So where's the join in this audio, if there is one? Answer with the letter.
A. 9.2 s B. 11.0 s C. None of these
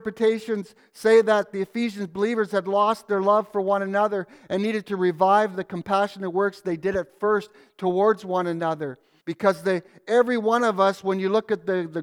A